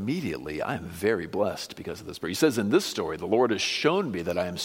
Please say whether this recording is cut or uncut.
uncut